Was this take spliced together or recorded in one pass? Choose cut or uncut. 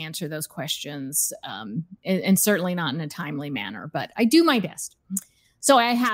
uncut